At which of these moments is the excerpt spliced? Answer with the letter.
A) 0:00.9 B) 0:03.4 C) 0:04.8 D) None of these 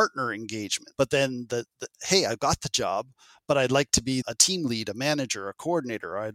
A